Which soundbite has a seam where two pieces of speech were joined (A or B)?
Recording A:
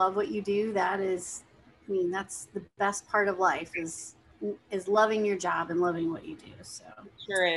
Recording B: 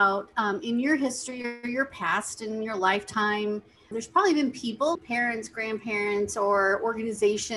B